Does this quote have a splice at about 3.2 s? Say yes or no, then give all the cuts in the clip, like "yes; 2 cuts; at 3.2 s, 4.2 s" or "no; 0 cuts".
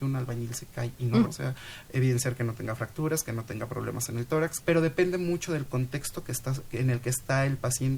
no; 2 cuts; at 1.2 s, 4.6 s